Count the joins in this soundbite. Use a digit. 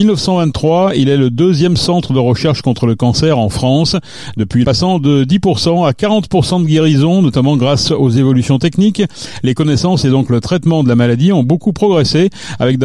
1